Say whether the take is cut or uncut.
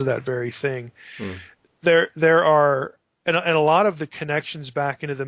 uncut